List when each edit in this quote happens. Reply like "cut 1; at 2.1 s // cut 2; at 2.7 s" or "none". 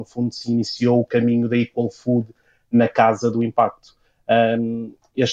none